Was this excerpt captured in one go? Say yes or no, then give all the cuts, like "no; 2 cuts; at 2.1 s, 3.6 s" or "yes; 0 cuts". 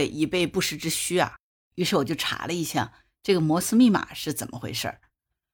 yes; 0 cuts